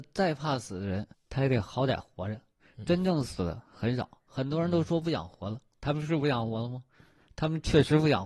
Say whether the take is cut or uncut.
uncut